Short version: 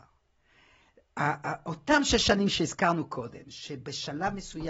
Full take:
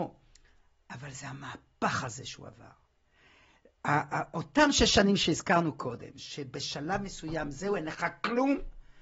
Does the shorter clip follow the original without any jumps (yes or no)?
yes